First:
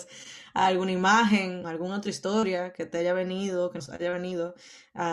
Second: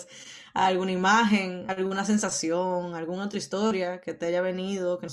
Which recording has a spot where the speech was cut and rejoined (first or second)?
first